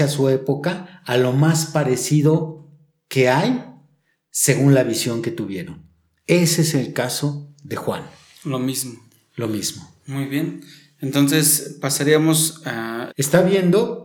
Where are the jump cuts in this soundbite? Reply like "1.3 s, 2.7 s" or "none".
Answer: 13.1 s